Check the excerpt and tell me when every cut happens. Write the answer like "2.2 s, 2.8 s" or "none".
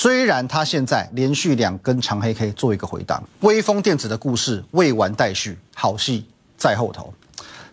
3.2 s